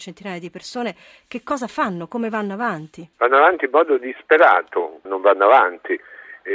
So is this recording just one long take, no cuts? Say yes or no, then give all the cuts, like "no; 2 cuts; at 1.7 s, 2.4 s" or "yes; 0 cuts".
no; 2 cuts; at 3.1 s, 5.1 s